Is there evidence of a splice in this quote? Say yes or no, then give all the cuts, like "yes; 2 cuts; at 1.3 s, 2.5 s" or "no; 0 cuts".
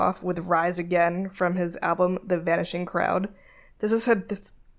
no; 0 cuts